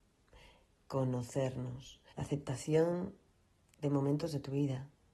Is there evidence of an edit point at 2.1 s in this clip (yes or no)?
yes